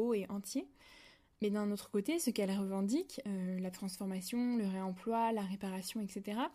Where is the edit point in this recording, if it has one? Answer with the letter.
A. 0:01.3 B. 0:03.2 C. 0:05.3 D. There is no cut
A